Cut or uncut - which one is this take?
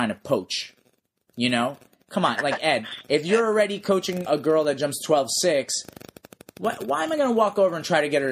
cut